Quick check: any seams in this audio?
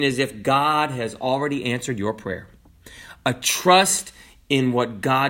no; 0 cuts

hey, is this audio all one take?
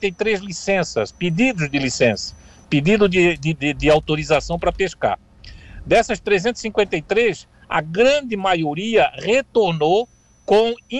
yes; 0 cuts

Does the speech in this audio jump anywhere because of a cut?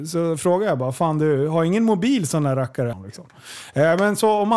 yes; 1 cut; at 2.9 s

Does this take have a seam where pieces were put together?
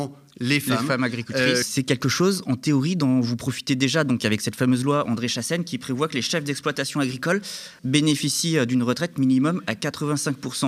yes; 2 cuts; at 1.6 s, 7.8 s

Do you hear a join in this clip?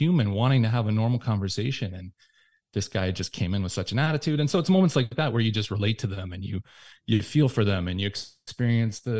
no; 0 cuts

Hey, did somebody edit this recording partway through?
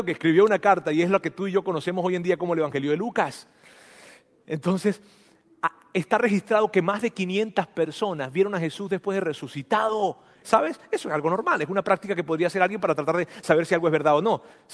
yes; 1 cut; at 10.4 s

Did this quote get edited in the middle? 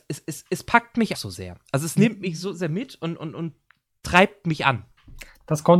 yes; 1 cut; at 1.1 s

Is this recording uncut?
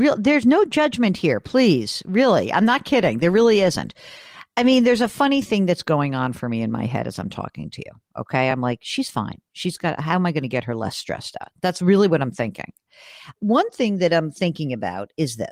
yes; 0 cuts

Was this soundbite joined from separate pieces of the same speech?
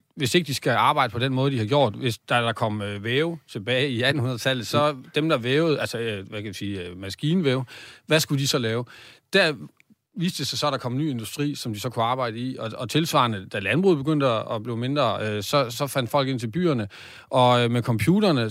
yes; 1 cut; at 15.7 s

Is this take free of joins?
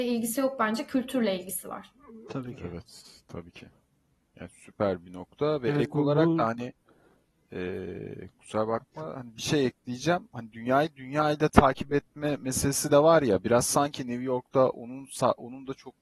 yes; 0 cuts

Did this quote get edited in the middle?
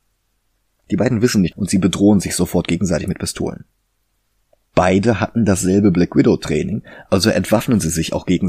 yes; 1 cut; at 1.5 s

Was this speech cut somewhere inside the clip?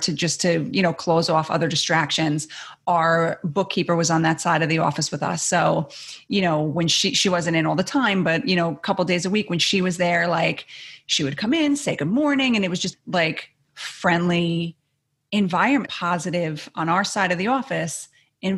yes; 2 cuts; at 12.9 s, 15.9 s

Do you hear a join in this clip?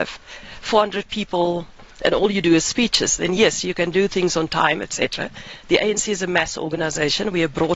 no; 0 cuts

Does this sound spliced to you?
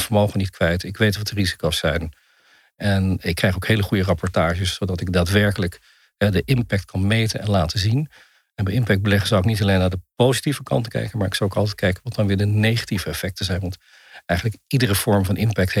no; 0 cuts

